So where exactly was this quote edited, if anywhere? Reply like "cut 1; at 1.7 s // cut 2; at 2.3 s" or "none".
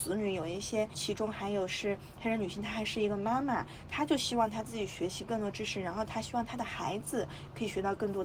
none